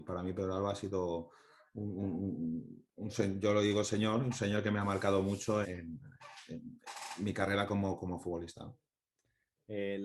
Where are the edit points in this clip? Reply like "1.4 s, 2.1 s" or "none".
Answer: 5.6 s